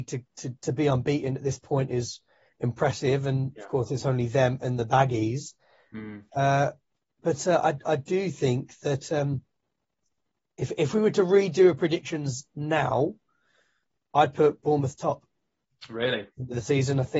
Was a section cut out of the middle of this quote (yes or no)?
no